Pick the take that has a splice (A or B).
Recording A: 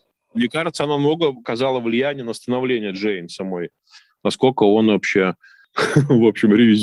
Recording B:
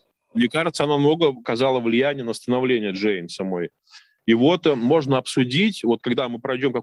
A